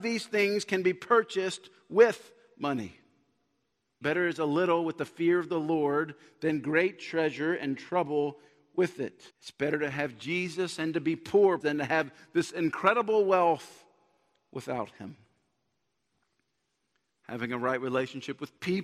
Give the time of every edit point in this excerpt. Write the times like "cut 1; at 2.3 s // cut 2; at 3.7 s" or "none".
cut 1; at 4.0 s // cut 2; at 9.3 s // cut 3; at 11.6 s